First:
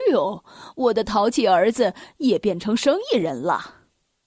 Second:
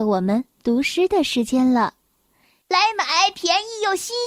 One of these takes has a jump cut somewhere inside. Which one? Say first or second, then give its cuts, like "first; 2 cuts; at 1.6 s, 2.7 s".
second; 1 cut; at 2.6 s